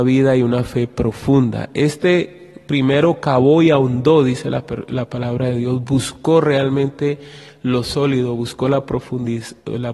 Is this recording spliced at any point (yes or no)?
no